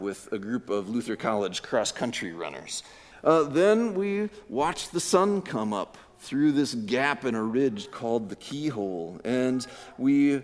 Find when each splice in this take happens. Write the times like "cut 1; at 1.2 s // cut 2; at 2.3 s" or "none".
cut 1; at 3.1 s